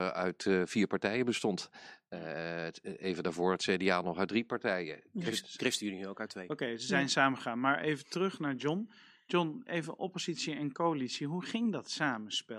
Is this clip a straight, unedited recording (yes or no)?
yes